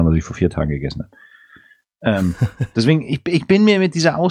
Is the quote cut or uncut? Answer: uncut